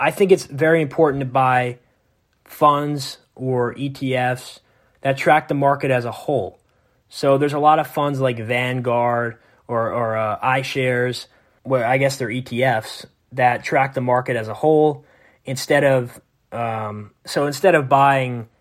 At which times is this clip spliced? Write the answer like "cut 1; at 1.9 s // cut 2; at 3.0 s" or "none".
cut 1; at 11.6 s